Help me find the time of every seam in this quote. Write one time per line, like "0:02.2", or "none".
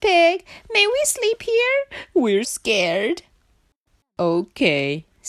0:02.4